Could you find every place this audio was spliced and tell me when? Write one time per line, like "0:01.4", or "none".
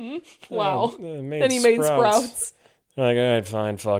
none